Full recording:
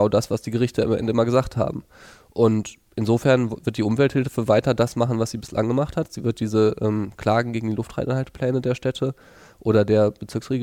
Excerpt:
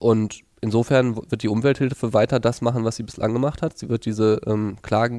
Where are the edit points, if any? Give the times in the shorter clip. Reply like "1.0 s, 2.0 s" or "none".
none